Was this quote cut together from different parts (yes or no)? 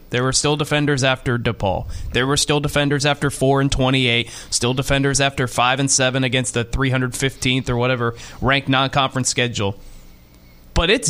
no